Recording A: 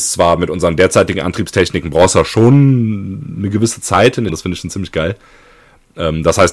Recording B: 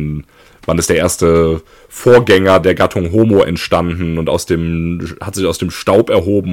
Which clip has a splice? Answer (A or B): A